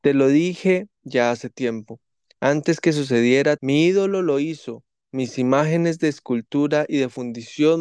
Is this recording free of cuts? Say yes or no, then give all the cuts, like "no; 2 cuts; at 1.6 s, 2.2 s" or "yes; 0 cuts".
no; 1 cut; at 3.6 s